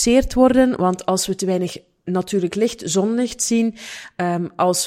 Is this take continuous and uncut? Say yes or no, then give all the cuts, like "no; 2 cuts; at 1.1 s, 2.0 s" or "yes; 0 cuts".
yes; 0 cuts